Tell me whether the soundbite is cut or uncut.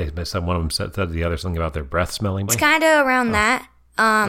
cut